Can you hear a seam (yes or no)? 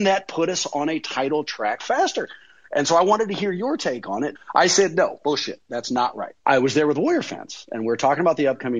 yes